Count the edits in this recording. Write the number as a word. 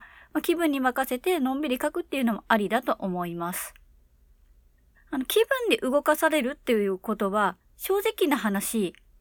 one